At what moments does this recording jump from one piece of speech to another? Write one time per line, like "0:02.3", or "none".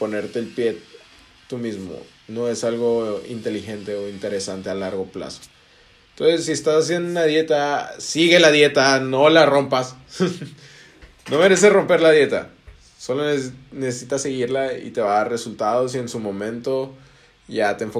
none